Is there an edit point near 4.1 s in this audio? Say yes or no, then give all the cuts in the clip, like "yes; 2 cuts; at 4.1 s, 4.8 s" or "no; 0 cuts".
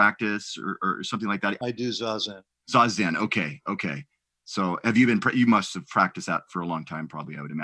no; 1 cut; at 1.6 s